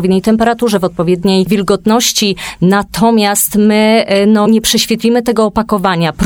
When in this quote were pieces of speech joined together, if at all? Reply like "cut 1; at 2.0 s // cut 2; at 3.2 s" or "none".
cut 1; at 4.4 s